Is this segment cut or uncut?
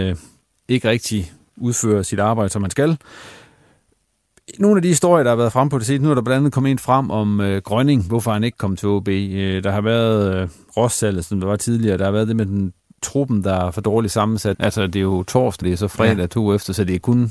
cut